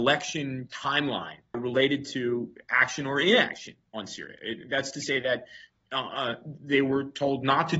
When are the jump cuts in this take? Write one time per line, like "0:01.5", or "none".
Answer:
0:01.5